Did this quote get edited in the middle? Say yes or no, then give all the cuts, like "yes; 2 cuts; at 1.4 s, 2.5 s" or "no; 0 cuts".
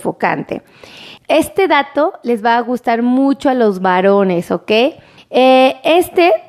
yes; 2 cuts; at 1.2 s, 5.2 s